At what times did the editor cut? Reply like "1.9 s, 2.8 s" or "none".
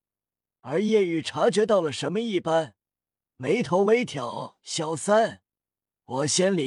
none